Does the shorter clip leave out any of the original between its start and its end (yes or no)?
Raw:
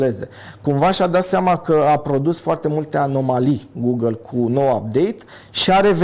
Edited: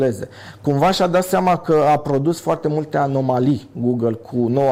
no